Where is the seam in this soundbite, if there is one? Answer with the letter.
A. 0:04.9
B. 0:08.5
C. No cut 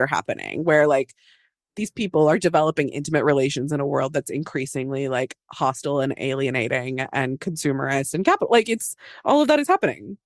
C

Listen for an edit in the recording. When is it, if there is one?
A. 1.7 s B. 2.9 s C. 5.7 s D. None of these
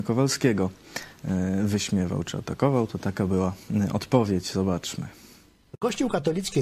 D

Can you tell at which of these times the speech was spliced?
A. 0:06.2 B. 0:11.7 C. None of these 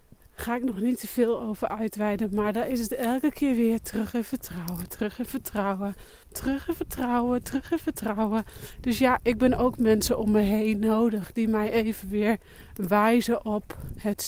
A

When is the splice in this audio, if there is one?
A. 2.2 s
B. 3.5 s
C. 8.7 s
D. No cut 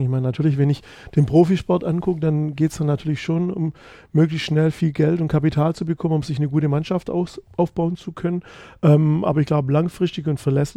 D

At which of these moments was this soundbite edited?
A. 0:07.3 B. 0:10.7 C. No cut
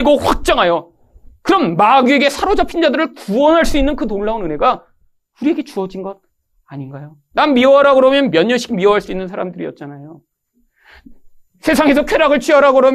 A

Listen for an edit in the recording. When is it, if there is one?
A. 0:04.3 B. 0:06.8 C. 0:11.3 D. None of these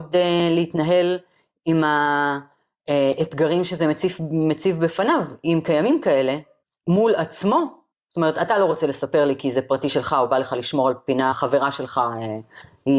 C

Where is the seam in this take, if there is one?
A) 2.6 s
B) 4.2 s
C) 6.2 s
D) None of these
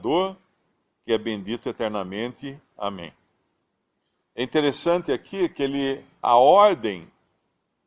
C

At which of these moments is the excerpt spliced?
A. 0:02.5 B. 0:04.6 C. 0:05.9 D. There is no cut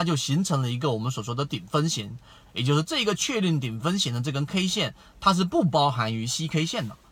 A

